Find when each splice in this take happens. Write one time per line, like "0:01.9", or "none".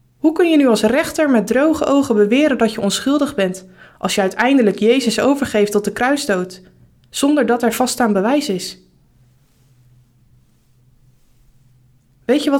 none